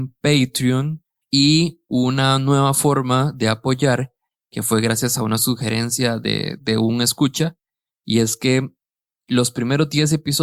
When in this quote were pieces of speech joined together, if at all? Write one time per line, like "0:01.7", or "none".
0:01.2